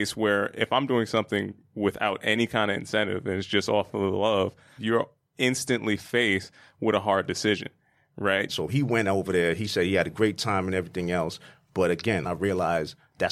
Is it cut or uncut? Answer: cut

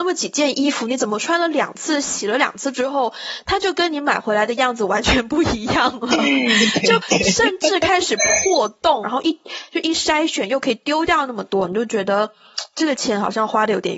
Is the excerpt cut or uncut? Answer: cut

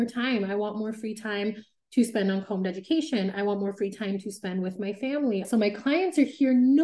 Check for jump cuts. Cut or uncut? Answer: cut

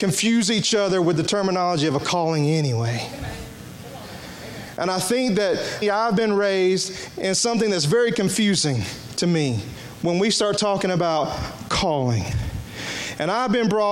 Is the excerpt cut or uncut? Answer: cut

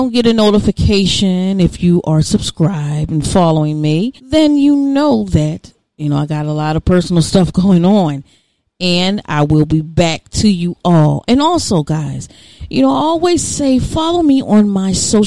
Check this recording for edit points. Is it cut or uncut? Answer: cut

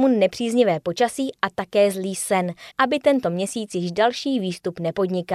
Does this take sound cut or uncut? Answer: cut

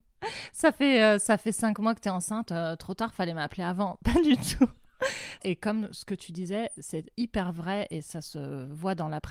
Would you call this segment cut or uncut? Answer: cut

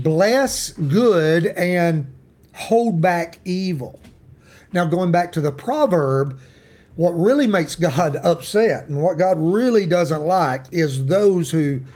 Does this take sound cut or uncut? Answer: uncut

